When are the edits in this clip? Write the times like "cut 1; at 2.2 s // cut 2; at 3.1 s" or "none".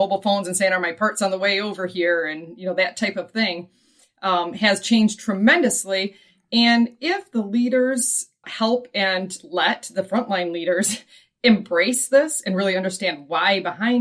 cut 1; at 8.4 s